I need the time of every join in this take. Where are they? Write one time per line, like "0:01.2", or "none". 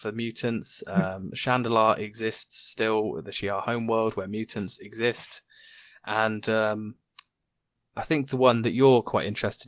none